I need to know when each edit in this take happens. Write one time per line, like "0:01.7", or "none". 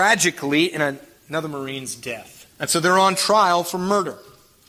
0:02.5